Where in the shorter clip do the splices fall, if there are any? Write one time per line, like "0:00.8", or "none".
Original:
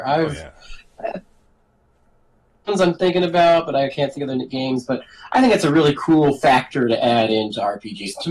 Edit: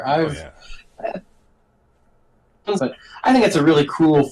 0:02.8